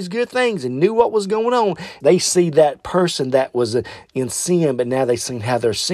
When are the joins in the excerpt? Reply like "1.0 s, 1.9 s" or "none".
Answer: 2.0 s